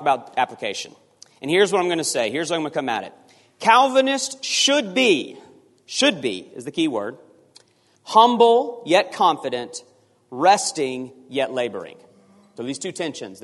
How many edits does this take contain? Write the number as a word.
one